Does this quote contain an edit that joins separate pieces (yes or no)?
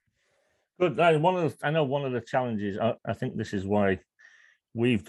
yes